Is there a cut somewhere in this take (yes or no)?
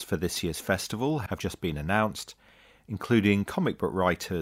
no